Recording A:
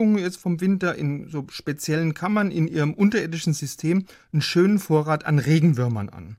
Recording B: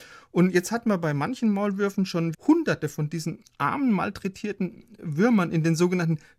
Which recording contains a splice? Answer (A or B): B